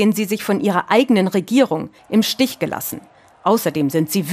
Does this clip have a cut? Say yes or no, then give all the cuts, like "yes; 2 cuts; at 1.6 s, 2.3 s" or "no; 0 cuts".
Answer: yes; 1 cut; at 2.0 s